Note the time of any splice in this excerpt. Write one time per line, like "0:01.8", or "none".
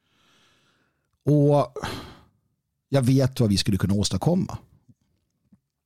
none

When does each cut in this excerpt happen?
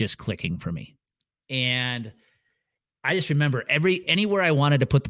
none

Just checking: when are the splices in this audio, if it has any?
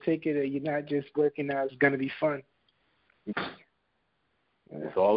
0:01.7
0:03.3

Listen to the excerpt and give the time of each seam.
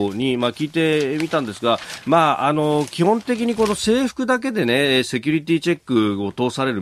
none

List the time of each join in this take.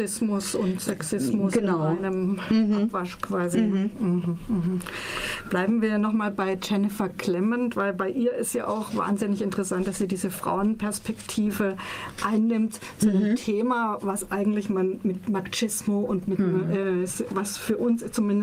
none

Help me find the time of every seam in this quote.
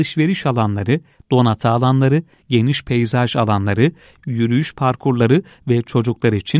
0:02.4

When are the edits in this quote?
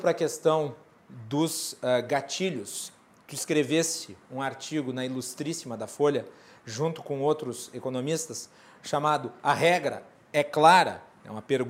none

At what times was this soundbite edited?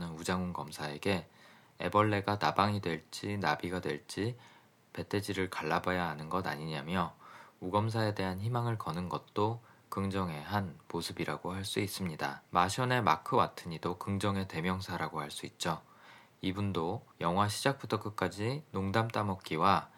0:12.4
0:17.1

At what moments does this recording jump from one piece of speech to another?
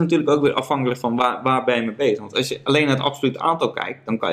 none

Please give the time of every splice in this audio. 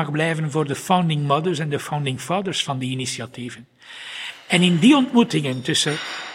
none

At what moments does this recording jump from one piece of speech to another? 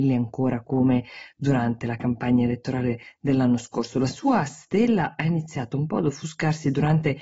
none

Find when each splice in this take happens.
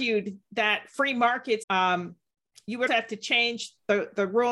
0:01.6
0:02.9

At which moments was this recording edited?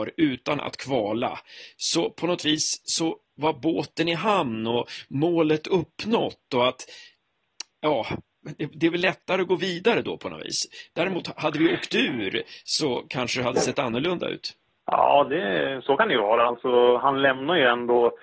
none

